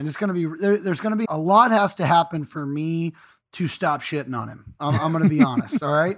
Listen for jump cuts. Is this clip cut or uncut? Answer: cut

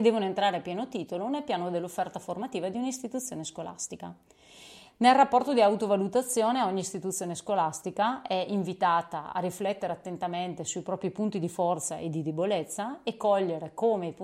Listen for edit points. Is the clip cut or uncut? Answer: cut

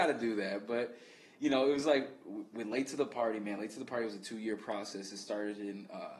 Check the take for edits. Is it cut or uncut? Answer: uncut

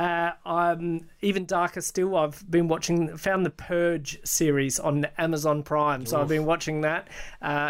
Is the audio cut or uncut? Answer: uncut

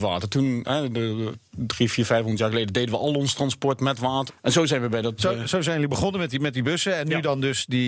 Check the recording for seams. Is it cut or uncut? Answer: cut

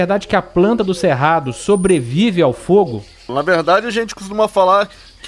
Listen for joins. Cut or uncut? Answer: cut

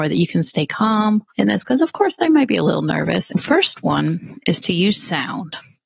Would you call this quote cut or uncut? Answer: cut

